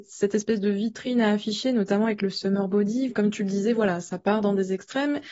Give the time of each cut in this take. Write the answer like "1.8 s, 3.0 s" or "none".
3.1 s

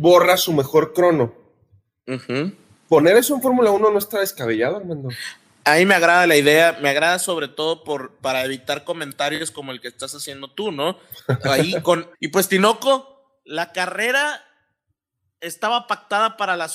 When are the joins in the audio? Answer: 12.1 s

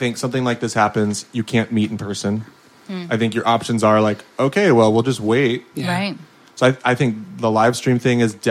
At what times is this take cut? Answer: 5.7 s

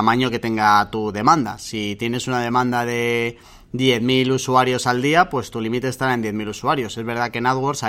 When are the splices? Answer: none

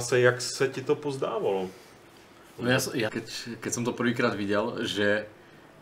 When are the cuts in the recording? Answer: 3.1 s

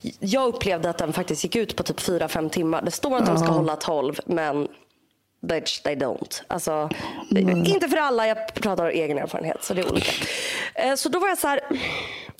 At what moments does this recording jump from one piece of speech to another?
none

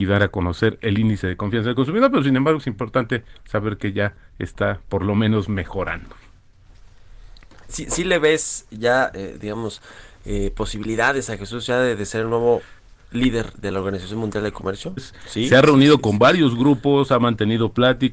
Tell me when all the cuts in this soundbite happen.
7.7 s, 15.0 s

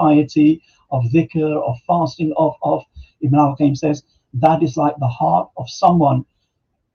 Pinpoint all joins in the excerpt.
3.1 s

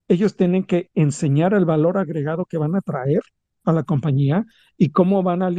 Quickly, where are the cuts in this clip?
none

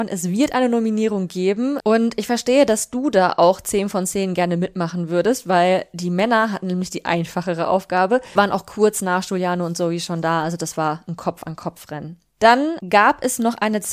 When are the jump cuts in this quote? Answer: 1.8 s, 8.4 s

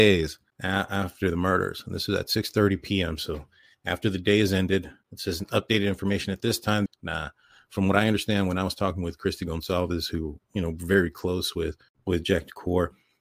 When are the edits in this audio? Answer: 6.9 s

